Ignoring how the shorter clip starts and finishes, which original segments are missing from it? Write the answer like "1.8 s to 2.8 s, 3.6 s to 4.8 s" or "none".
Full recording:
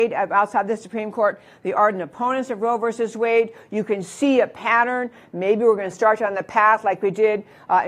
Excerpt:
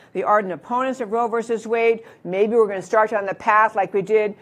3.7 s to 5.3 s